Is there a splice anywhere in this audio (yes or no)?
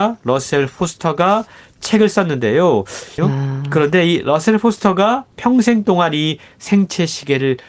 yes